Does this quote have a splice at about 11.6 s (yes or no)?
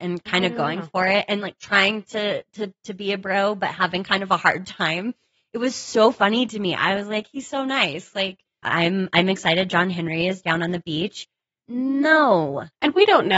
yes